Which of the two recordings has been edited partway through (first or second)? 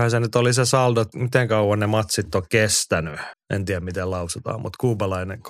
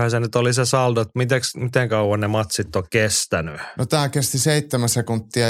first